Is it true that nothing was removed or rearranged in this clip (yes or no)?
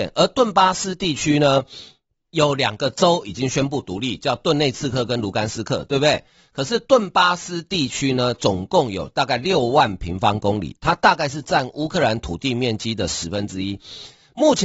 yes